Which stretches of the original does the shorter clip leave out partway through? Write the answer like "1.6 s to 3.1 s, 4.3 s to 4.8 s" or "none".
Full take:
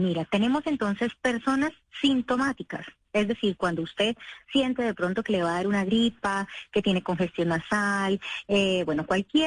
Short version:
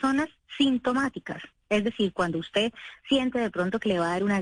none